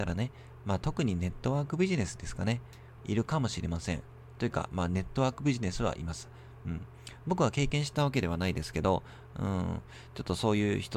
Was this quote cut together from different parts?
yes; 1 cut; at 3.0 s

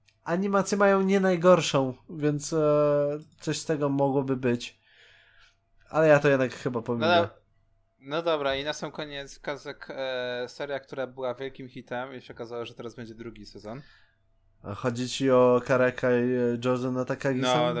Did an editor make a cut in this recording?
no; 0 cuts

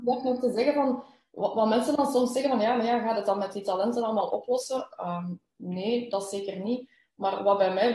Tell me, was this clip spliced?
no; 0 cuts

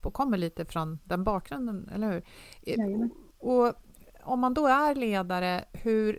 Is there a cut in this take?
no; 0 cuts

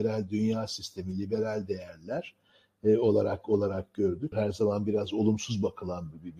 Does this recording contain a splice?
yes; 1 cut; at 4.3 s

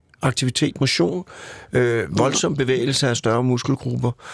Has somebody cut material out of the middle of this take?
no; 0 cuts

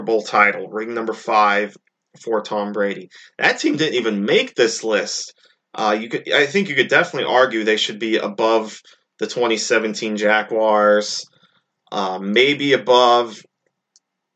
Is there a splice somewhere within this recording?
no; 0 cuts

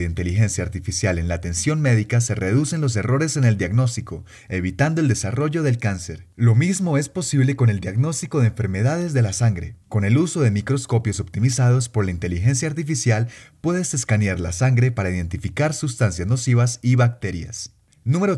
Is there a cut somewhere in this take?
yes; 1 cut; at 9.8 s

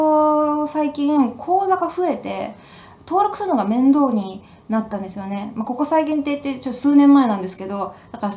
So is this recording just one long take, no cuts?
yes; 0 cuts

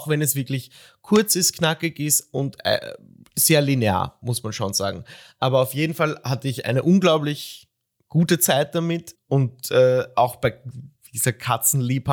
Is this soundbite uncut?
no; 1 cut; at 9.1 s

